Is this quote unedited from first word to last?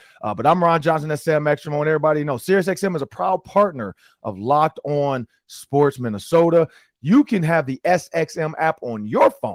yes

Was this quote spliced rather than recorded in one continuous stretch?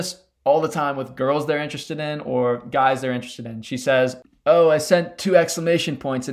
no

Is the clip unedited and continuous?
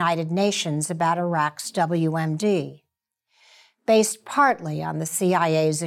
yes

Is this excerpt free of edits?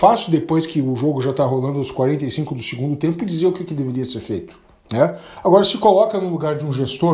yes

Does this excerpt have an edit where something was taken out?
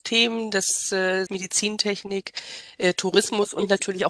yes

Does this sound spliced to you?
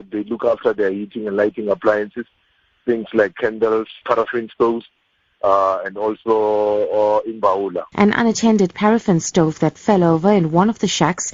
yes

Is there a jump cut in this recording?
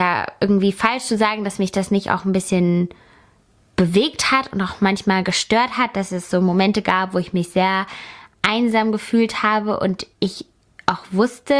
yes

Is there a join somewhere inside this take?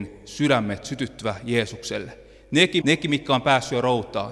yes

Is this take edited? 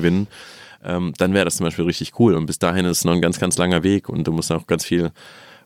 no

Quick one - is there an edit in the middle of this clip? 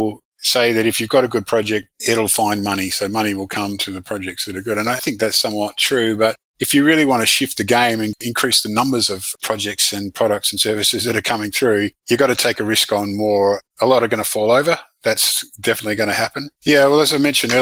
yes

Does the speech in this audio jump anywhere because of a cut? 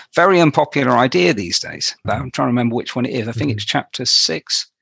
yes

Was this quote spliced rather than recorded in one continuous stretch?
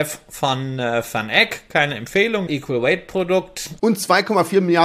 yes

